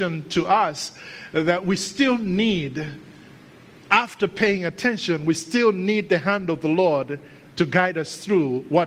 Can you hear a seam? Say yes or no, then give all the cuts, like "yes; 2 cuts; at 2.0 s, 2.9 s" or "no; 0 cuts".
no; 0 cuts